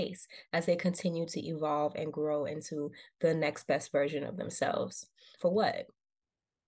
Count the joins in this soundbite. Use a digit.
1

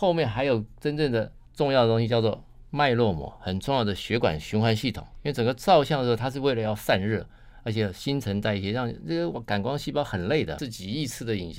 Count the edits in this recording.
2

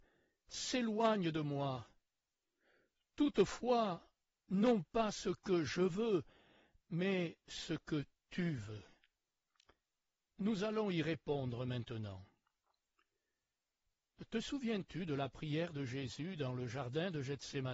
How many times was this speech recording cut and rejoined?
1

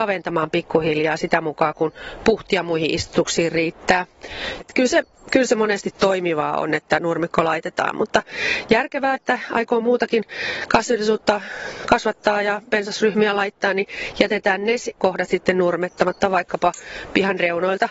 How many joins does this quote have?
2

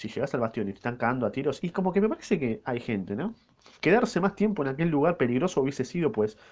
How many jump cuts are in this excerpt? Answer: 0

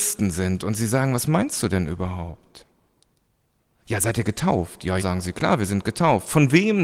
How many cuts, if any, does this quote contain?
1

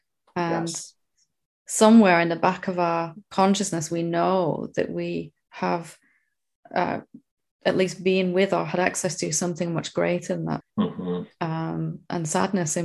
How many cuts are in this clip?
1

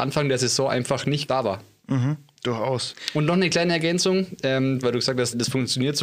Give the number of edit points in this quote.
1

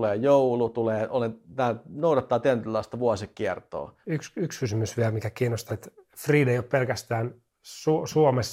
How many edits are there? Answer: 2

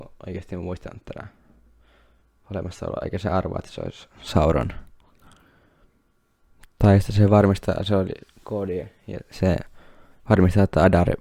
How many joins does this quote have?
0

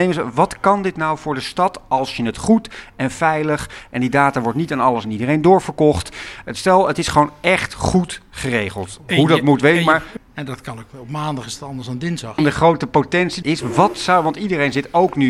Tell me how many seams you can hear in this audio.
3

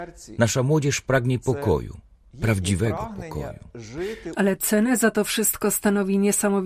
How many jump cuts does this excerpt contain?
1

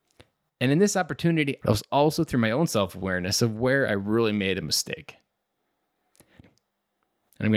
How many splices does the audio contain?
2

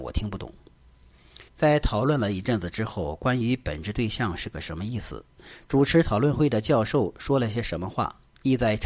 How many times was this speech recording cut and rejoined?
1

